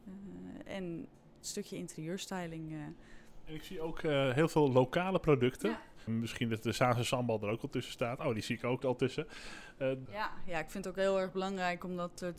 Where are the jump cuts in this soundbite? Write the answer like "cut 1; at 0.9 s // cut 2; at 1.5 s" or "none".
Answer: cut 1; at 6.1 s // cut 2; at 8.8 s // cut 3; at 10.1 s